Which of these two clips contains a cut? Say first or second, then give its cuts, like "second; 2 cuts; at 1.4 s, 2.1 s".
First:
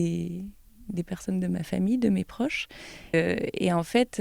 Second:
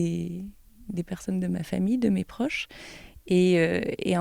first; 1 cut; at 3.1 s